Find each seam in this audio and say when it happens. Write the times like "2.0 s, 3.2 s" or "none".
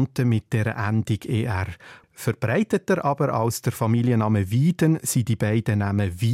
2.0 s